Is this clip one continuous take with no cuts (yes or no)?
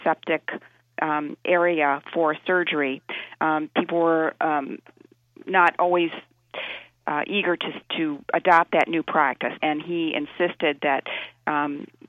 no